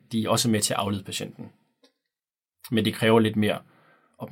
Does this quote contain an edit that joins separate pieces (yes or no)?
no